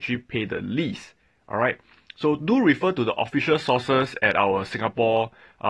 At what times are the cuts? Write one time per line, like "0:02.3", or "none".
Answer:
none